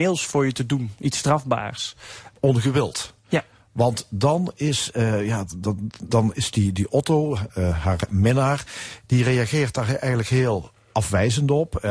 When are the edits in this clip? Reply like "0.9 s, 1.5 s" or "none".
2.3 s